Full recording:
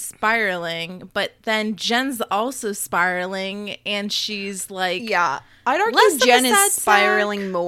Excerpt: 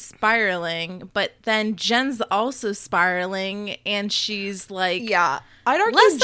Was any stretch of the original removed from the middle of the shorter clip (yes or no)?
no